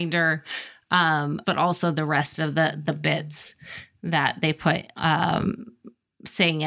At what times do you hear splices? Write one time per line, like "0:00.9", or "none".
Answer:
0:01.4